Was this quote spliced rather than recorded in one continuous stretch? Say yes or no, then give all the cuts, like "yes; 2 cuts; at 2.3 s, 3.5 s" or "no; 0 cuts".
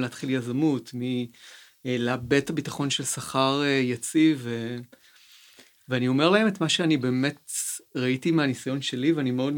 no; 0 cuts